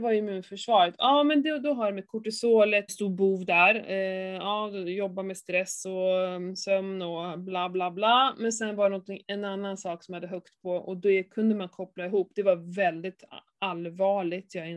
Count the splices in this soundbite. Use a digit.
1